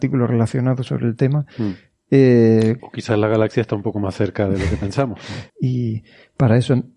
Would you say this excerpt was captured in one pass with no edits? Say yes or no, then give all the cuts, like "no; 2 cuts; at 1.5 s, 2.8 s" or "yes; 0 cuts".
no; 2 cuts; at 2.8 s, 5.5 s